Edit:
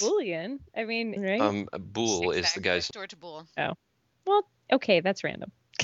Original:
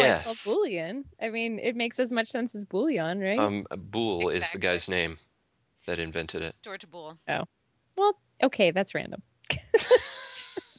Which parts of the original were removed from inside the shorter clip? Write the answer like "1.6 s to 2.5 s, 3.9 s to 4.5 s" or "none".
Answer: 1.6 s to 3.1 s, 4.9 s to 6.6 s